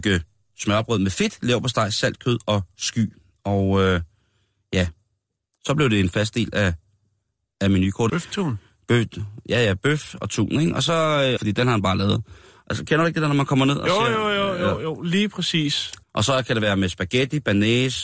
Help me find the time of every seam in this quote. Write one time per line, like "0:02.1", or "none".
0:08.1
0:11.4
0:16.0